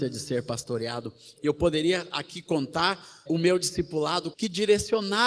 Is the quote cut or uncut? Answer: cut